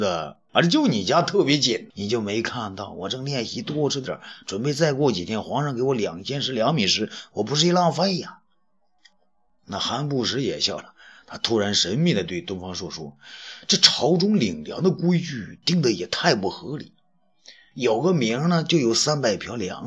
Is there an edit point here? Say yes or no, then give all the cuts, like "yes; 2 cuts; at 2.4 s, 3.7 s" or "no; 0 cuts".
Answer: yes; 1 cut; at 1.9 s